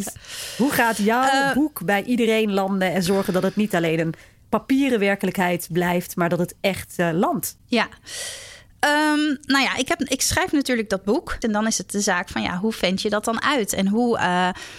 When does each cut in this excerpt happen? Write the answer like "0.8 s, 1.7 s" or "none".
11.4 s